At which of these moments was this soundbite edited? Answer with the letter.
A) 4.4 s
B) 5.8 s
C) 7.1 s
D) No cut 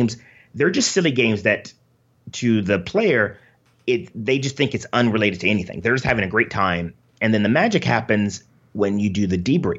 D